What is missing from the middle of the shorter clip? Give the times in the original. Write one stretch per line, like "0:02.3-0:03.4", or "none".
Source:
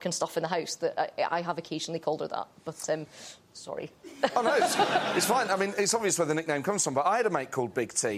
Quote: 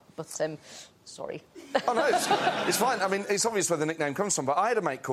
none